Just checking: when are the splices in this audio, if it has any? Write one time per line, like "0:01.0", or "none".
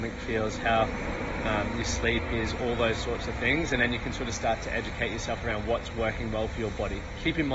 none